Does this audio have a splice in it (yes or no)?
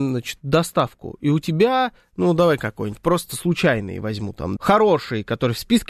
yes